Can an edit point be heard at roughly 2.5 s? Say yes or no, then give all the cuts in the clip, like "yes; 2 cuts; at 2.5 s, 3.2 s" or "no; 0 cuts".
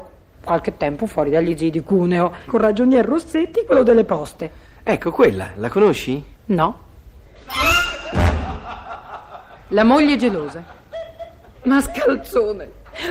yes; 2 cuts; at 2.5 s, 6.3 s